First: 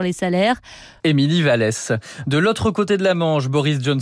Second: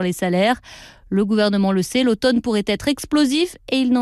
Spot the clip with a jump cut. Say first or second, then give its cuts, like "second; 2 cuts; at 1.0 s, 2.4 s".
first; 1 cut; at 1.0 s